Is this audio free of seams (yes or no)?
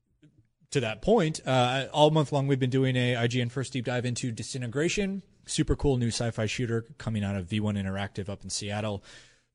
yes